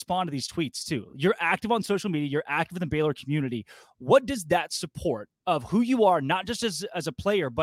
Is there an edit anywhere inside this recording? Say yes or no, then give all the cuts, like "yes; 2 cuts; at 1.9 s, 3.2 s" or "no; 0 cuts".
no; 0 cuts